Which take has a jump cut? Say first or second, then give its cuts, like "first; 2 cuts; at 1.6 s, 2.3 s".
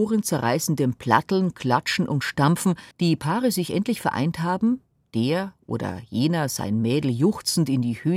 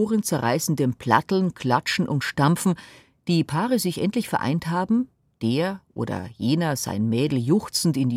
first; 1 cut; at 2.9 s